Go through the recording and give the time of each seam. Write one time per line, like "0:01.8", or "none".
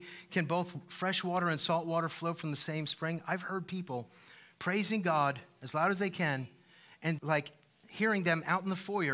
0:07.2